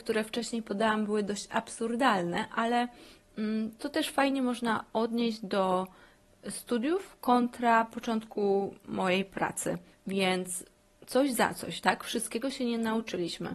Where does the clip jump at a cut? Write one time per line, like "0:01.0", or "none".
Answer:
0:09.9